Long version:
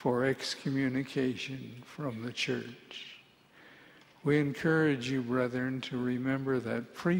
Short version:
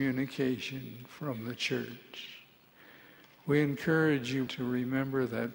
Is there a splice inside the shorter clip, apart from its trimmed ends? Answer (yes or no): yes